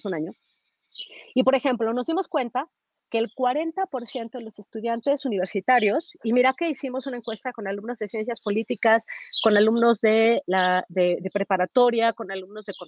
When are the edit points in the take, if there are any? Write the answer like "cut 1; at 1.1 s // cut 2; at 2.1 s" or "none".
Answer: none